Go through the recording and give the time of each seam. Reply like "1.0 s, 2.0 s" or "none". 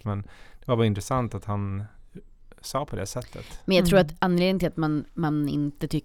none